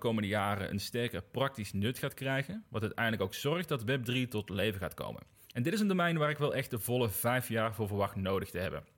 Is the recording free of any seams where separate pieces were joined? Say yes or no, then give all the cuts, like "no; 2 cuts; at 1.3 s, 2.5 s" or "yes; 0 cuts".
yes; 0 cuts